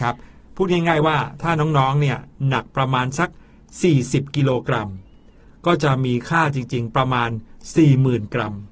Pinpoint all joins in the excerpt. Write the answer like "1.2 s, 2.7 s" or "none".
none